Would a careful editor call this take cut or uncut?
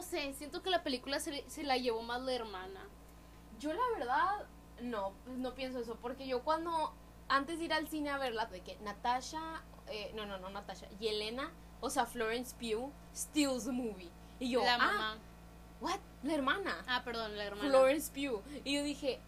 cut